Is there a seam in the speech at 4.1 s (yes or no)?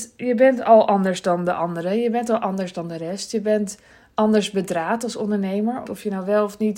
no